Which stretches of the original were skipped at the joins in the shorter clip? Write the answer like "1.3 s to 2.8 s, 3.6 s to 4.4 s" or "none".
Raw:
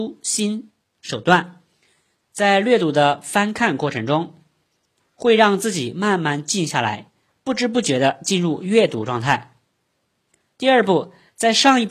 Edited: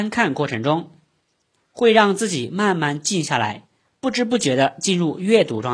none